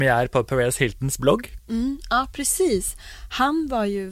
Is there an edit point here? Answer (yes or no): yes